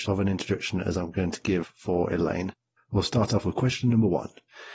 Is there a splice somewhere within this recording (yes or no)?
yes